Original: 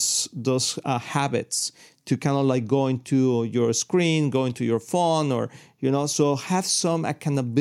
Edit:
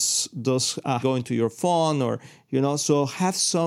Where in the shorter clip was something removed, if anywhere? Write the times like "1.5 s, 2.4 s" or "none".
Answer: 1.0 s